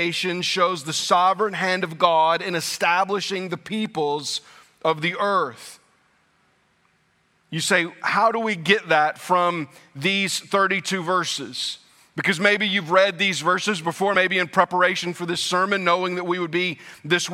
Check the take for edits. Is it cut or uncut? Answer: uncut